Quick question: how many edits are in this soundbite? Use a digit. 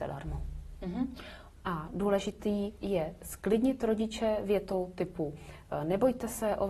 1